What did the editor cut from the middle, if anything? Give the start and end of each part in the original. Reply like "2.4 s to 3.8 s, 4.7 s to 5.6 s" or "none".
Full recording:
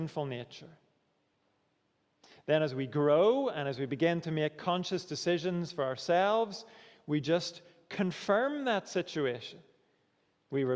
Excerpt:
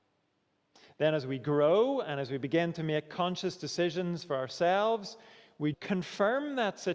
7.2 s to 7.8 s